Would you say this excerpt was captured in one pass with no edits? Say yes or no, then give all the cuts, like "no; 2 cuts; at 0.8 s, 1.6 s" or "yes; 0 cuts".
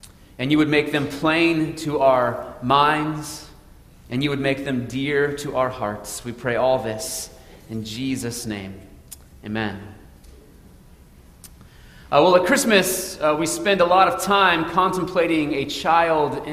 yes; 0 cuts